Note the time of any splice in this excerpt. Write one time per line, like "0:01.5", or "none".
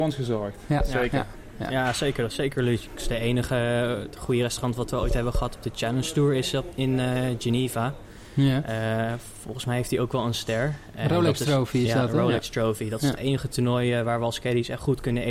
none